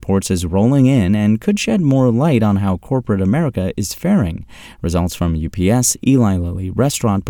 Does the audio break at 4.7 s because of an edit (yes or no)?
no